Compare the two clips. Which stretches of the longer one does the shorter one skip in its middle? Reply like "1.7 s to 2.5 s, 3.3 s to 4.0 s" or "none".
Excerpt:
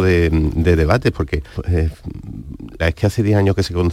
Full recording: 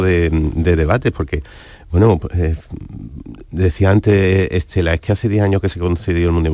1.5 s to 2.2 s, 3.5 s to 4.9 s